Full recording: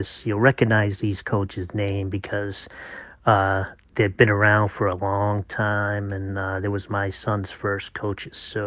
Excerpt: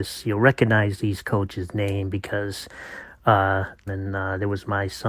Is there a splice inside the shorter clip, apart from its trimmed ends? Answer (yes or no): yes